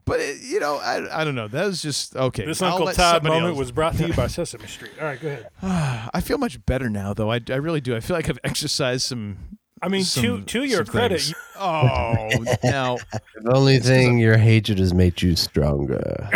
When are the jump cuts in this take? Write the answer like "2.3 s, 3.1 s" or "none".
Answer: 11.3 s, 13.3 s